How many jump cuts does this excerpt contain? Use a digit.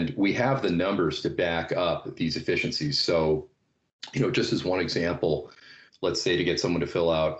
1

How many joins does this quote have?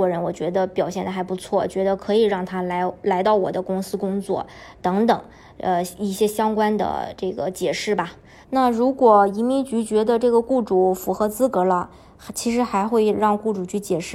1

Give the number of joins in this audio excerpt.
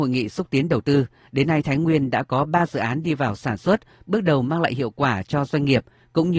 0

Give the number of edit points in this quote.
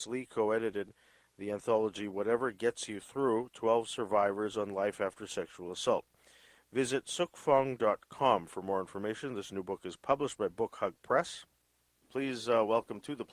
0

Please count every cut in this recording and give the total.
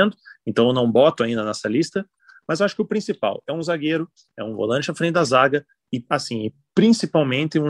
0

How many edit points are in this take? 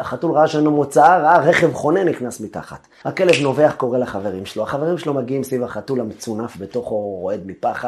1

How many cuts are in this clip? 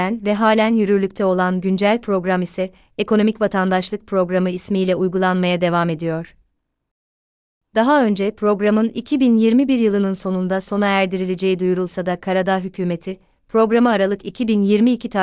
0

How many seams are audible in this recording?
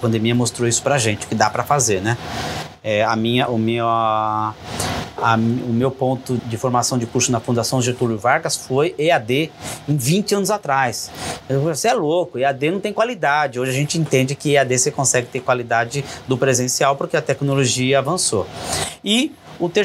1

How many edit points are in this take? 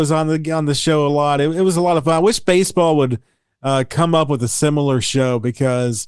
0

